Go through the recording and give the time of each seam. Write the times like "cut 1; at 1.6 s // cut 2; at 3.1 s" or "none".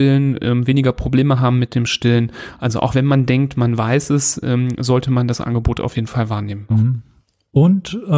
cut 1; at 6.7 s